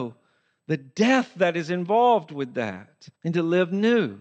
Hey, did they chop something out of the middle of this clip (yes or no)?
yes